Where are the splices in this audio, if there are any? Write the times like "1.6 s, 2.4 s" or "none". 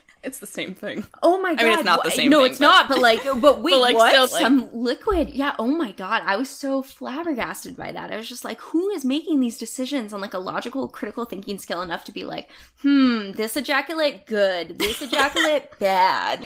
4.3 s